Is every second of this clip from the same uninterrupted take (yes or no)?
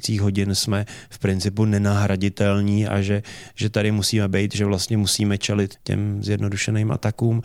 no